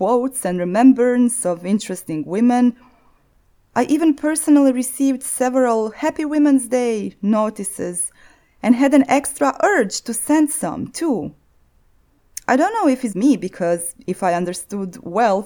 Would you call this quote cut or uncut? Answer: cut